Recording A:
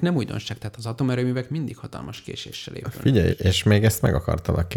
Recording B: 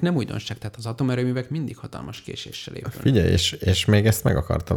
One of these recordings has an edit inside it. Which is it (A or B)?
A